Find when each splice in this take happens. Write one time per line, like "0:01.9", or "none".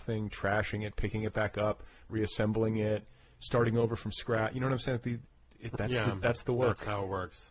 0:02.1
0:05.8